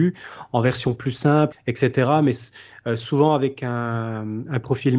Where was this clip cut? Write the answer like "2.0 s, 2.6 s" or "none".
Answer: 1.5 s